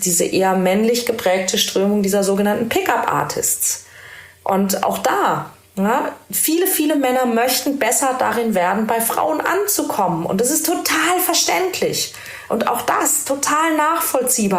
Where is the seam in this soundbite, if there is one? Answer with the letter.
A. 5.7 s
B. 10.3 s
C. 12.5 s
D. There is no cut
C